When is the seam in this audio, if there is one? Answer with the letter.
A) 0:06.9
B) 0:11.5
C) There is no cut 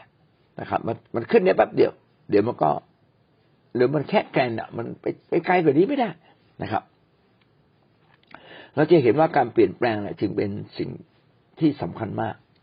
C